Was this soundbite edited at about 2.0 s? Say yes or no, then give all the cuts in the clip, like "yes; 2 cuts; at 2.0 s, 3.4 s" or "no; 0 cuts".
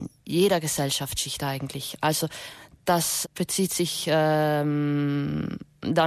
no; 1 cut; at 3.2 s